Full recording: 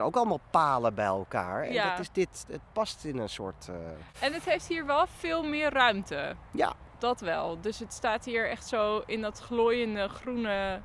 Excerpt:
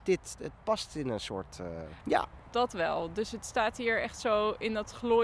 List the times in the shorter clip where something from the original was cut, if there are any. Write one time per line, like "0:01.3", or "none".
0:02.0